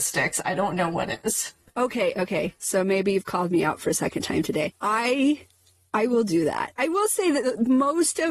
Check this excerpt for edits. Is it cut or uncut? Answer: uncut